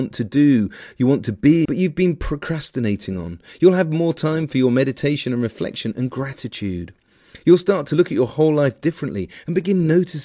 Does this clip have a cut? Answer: yes; 1 cut; at 1.7 s

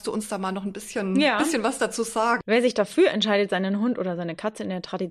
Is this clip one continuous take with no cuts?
no; 1 cut; at 2.4 s

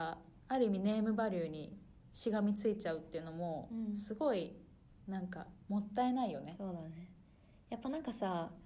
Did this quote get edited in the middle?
yes; 1 cut; at 6.5 s

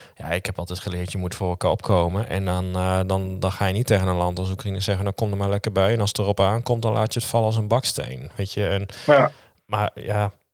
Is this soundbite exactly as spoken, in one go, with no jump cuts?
yes; 0 cuts

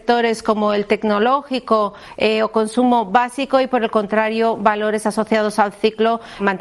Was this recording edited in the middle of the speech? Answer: no; 0 cuts

